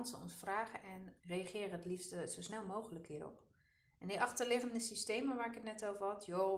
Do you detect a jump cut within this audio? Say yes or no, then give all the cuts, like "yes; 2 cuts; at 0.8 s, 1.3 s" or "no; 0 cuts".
yes; 1 cut; at 1.2 s